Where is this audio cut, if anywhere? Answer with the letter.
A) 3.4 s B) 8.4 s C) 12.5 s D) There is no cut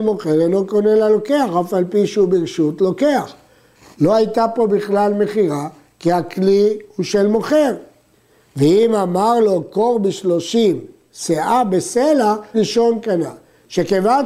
C